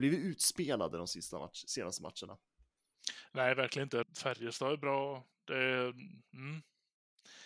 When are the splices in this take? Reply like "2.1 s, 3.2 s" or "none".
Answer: 4.0 s